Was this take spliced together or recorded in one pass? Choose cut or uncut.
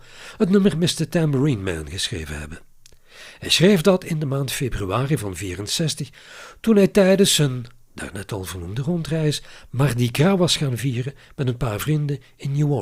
uncut